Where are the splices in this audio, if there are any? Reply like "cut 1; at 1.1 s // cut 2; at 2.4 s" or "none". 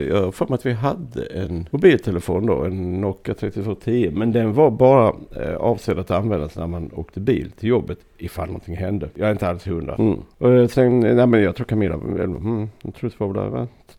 cut 1; at 10.0 s

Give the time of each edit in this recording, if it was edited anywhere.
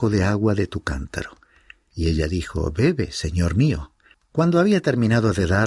cut 1; at 4.1 s

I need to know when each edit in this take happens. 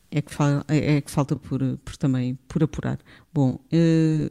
none

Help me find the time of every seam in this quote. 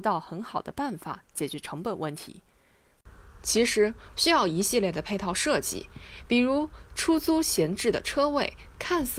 cut 1; at 4.1 s

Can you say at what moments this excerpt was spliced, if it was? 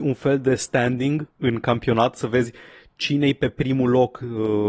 cut 1; at 1.3 s

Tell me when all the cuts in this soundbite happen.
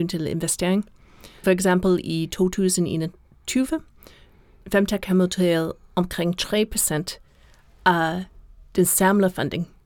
cut 1; at 1.4 s

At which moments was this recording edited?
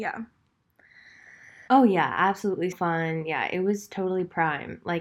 cut 1; at 1.7 s // cut 2; at 2.7 s

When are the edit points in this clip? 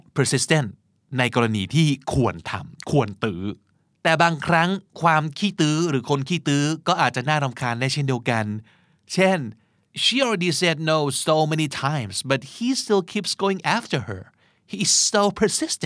none

